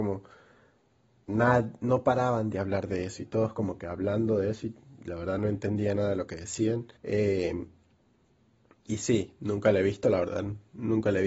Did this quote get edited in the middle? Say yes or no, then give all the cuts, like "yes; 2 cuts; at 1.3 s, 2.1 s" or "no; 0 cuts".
yes; 1 cut; at 7.0 s